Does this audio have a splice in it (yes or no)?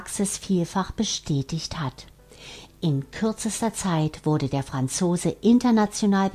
no